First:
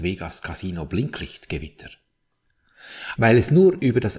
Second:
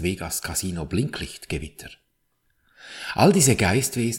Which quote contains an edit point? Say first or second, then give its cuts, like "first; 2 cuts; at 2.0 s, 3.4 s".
first; 1 cut; at 3.1 s